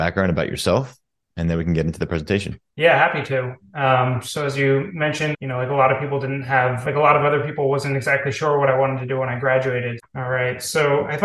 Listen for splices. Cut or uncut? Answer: cut